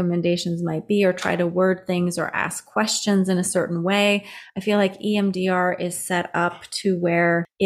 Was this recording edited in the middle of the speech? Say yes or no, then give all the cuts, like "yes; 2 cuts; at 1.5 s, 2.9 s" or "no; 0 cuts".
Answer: no; 0 cuts